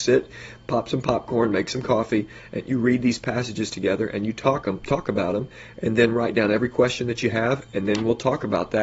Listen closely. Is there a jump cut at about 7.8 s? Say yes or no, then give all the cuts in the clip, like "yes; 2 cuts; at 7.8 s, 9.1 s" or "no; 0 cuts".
no; 0 cuts